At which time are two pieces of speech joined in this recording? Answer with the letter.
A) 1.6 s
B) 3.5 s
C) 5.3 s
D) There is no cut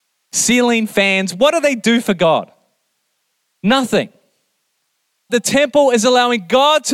C